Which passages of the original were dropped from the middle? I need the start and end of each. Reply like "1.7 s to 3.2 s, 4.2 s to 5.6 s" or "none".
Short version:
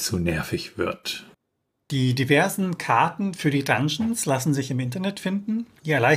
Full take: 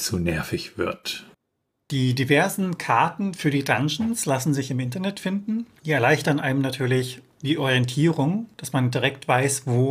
none

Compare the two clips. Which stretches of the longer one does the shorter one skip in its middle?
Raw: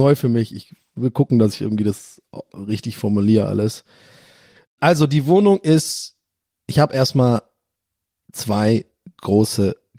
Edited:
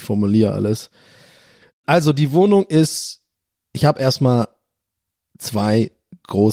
none

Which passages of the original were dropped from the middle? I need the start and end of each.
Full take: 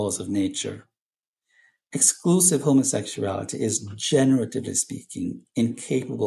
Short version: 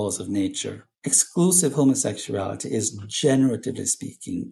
1.0 s to 1.8 s

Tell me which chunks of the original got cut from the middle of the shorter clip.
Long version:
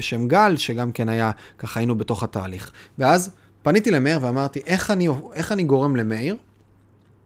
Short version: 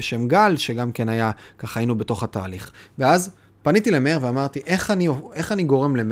none

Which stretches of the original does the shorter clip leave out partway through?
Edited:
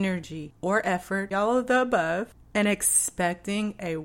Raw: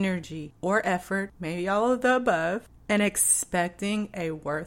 1.3 s to 1.7 s

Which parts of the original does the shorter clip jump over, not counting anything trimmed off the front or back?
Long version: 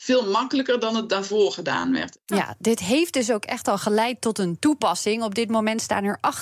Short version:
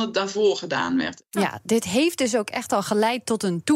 none

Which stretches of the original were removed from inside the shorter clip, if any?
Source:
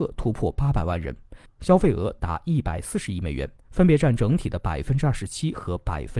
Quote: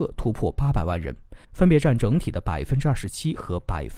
1.4 s to 3.6 s

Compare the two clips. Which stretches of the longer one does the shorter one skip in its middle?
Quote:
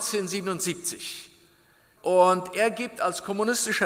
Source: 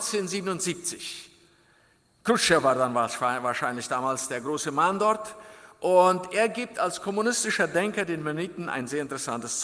2.0 s to 5.8 s

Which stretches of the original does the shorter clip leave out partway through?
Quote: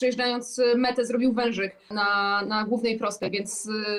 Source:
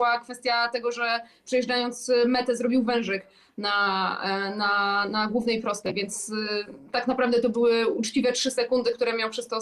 3.4 s to 4.5 s

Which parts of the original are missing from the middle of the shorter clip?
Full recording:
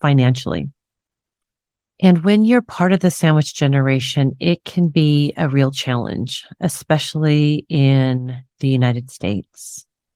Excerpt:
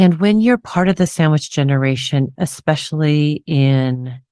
4.4 s to 6.6 s

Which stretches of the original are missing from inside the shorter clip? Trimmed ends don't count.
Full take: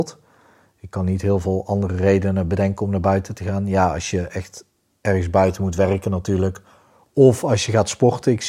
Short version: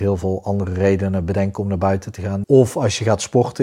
3.7 s to 7.1 s

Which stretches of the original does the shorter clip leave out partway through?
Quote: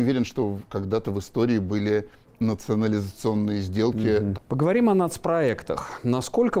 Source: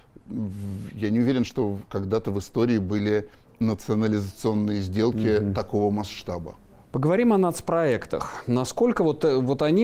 5.5 s to 6.8 s

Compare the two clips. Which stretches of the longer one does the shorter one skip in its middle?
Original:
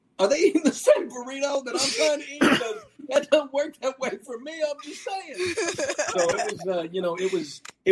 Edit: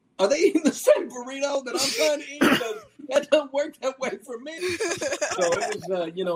4.6 s to 5.3 s

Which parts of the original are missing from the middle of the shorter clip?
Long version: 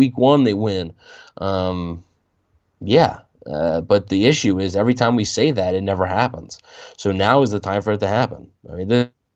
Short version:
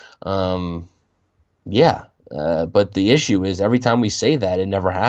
none

